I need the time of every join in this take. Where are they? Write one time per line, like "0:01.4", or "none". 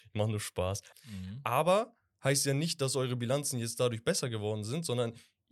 0:00.9

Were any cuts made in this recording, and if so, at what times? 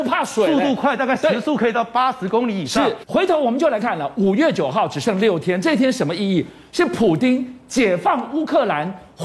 0:03.8

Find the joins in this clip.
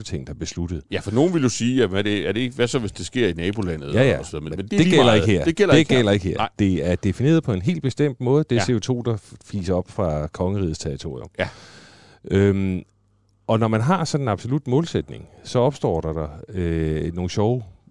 0:04.7

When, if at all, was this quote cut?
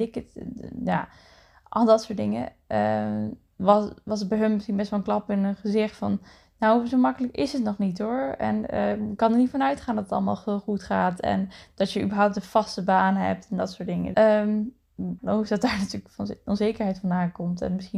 0:14.1
0:15.2

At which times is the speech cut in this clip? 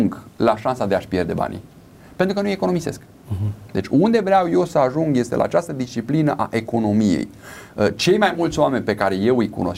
none

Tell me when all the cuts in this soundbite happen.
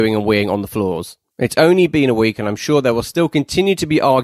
0:01.3

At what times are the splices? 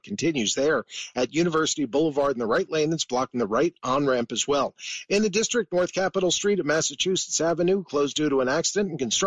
none

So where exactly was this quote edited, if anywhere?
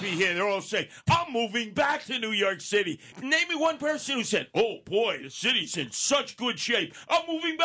0:03.1

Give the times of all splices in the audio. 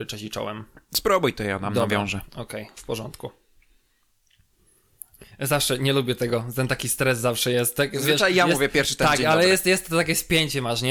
none

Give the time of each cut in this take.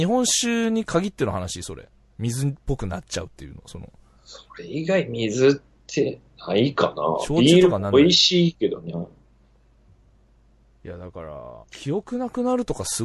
0:08.9
0:11.6

